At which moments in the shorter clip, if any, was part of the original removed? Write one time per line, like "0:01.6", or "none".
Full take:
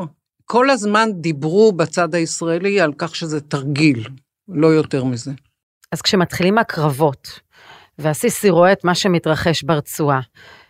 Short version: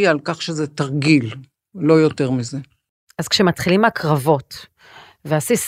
none